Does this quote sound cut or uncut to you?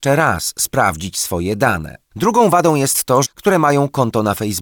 cut